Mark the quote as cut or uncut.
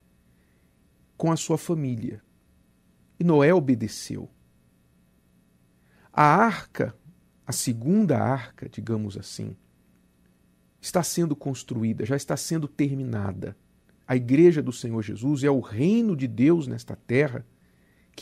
cut